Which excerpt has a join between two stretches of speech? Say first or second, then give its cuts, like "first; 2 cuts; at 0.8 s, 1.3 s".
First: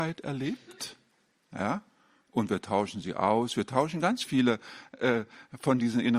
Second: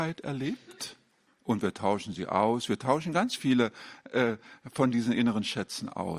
second; 1 cut; at 1.3 s